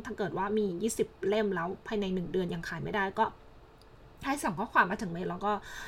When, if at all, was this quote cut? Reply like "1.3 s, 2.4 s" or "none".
none